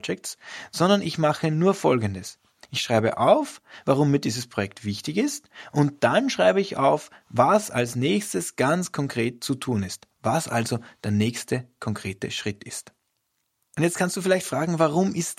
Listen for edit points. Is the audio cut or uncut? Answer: uncut